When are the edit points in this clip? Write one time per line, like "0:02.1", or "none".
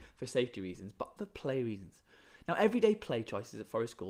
0:01.2